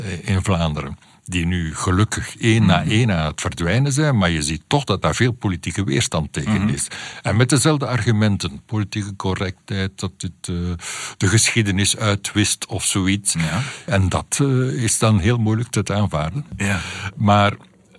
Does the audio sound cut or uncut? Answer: cut